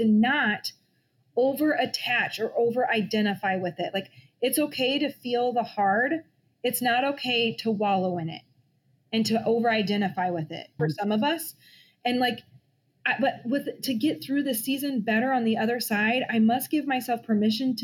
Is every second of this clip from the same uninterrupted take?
no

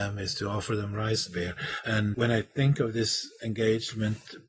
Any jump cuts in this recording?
yes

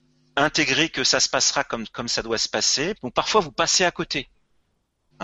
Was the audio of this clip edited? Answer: yes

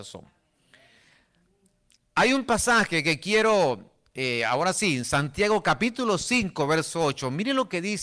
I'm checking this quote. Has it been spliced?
no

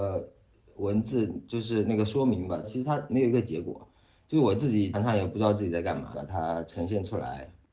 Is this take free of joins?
no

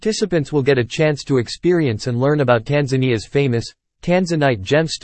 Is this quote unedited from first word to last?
yes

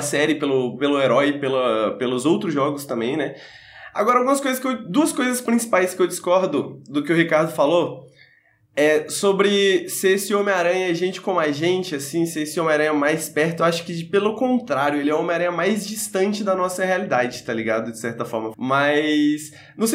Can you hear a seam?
yes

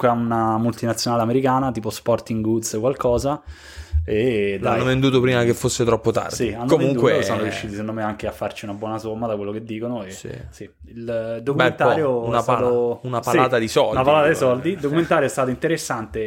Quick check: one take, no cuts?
yes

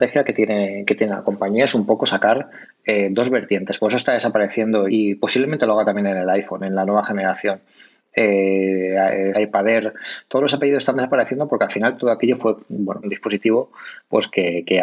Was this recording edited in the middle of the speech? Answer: yes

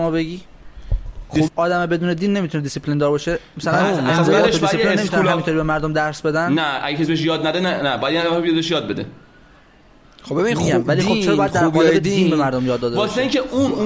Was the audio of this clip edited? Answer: yes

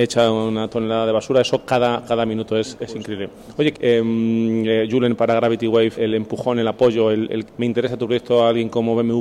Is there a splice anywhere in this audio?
yes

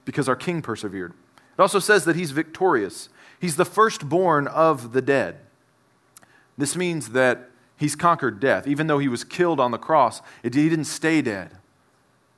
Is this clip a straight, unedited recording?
yes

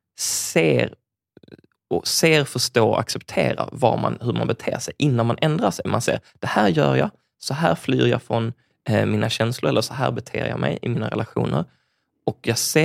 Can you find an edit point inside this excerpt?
no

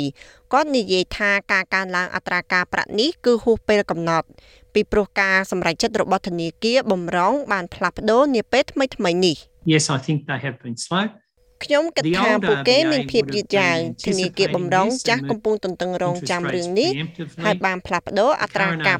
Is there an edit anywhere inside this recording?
yes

